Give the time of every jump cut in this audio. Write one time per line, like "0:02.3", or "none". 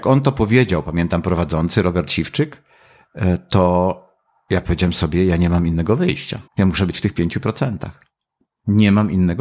0:06.5

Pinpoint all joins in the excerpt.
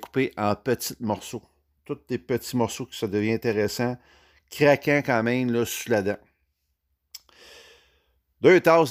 none

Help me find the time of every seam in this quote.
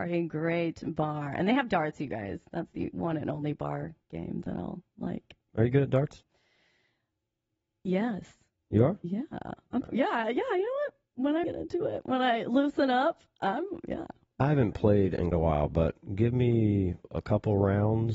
0:11.4
0:15.3

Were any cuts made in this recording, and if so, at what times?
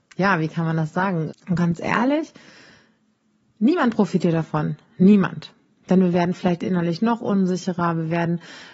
0:01.3

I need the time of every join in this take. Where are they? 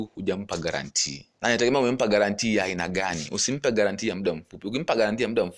0:01.3

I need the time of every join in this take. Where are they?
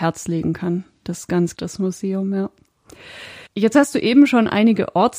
0:01.5
0:03.5

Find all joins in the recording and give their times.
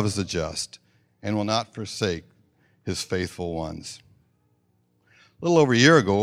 none

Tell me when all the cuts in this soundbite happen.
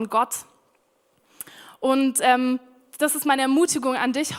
none

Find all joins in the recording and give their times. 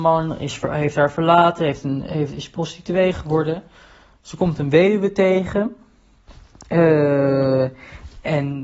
none

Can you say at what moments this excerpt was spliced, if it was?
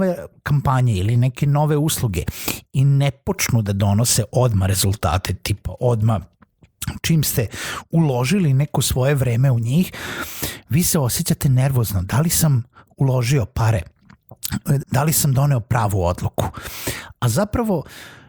0:14.8

